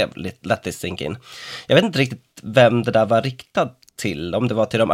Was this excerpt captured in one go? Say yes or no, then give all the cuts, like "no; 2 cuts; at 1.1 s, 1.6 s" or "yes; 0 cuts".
yes; 0 cuts